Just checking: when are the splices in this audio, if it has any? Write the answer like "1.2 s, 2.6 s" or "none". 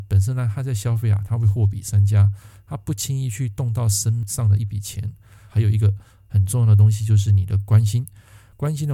5.5 s